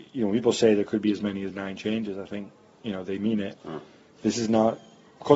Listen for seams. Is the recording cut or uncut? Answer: cut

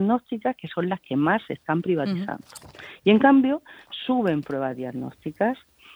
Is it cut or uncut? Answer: uncut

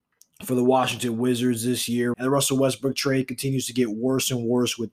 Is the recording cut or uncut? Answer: cut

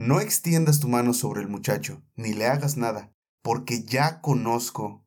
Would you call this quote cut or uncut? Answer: uncut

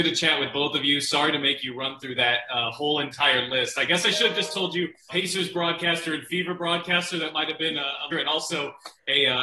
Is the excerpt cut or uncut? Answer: cut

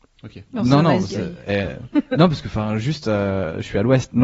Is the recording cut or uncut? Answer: uncut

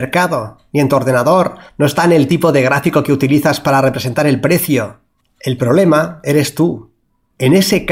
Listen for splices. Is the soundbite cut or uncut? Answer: uncut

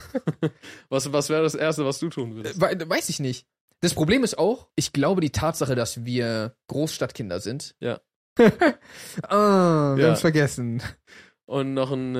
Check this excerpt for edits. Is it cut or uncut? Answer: cut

